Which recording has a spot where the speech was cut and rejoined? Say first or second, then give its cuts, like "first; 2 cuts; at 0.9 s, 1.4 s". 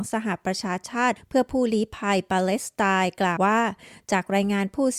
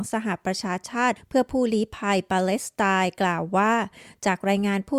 first; 1 cut; at 3.4 s